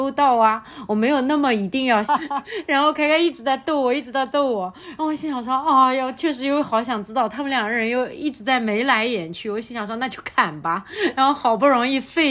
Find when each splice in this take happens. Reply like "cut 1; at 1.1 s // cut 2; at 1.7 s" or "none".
cut 1; at 2.1 s